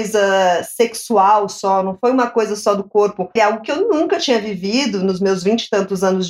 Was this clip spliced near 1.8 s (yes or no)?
no